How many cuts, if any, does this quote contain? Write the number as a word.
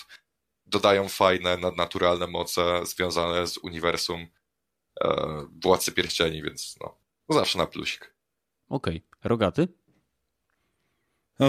one